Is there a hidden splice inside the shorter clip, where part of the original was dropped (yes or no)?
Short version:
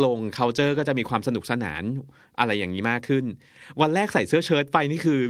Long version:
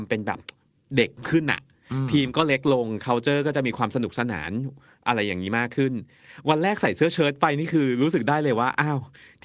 no